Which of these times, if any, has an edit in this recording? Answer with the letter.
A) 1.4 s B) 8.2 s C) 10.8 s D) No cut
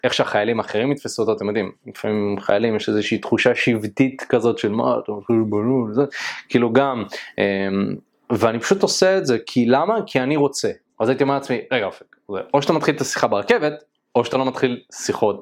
C